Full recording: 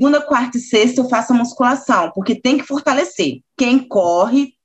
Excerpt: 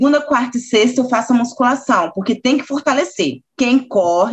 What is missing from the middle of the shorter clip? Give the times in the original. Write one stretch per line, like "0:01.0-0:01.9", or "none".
none

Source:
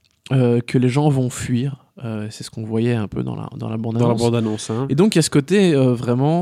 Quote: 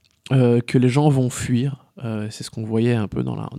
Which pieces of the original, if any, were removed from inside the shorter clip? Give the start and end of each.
none

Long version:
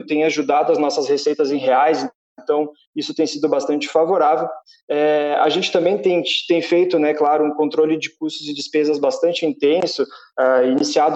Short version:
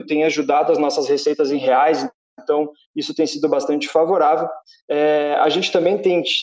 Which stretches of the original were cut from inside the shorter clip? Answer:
none

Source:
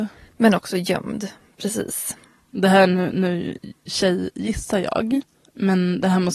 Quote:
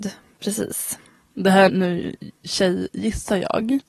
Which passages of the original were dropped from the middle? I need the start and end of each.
0:02.9-0:03.1

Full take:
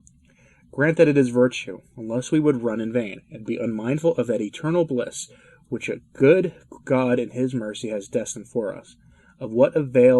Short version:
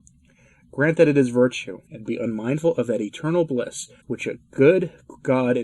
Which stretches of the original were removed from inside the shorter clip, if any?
0:01.9-0:03.3
0:05.4-0:05.6

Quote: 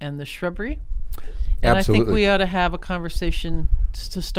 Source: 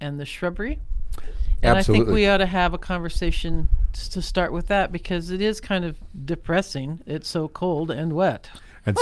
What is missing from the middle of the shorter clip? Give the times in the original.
none

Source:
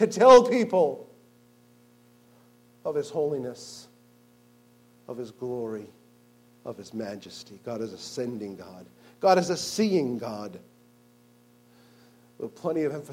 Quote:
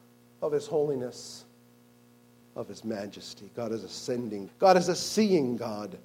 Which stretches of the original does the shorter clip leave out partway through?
0:04.8-0:06.5
0:08.6-0:09.1

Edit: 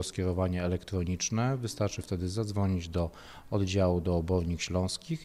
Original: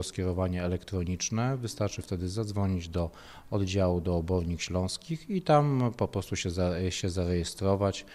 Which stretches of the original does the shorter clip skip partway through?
none

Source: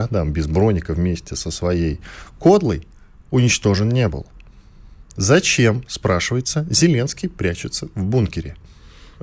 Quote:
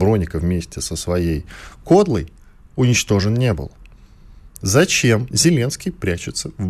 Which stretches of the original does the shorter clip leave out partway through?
0:05.9-0:06.7

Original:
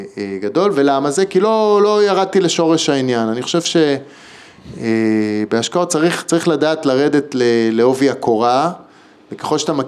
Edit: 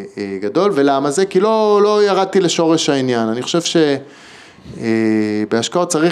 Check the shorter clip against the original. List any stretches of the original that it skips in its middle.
none

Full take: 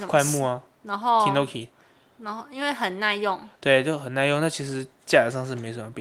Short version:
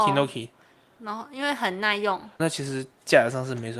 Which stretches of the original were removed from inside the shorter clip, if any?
0:03.6-0:04.4

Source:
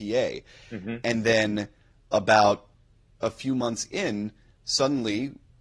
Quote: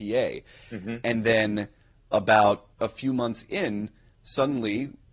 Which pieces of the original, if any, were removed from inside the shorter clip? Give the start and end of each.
0:02.7-0:03.1

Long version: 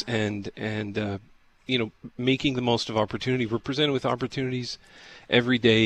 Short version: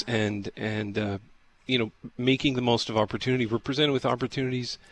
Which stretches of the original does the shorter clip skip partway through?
none

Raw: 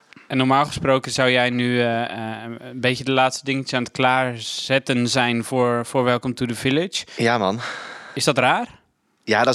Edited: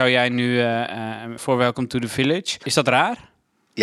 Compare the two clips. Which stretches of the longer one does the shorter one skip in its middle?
0:02.6-0:05.8
0:07.1-0:08.1

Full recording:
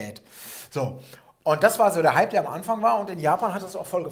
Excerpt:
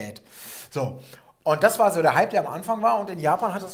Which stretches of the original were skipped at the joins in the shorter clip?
none

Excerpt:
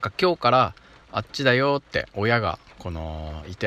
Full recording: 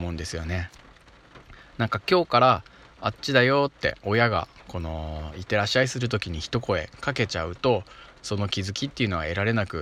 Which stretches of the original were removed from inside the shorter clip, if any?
none

